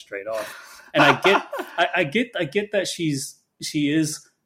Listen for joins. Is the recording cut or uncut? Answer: uncut